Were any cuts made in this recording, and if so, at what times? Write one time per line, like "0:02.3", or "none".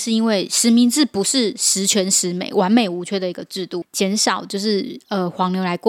0:03.8